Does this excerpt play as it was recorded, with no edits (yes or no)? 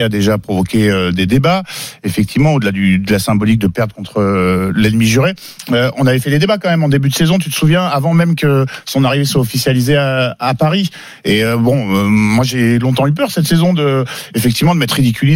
yes